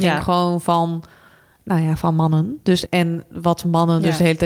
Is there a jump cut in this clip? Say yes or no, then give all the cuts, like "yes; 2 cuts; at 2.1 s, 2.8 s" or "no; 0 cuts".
yes; 1 cut; at 2.8 s